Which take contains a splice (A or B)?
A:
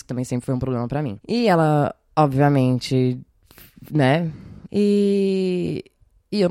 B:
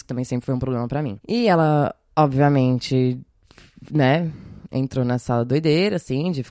A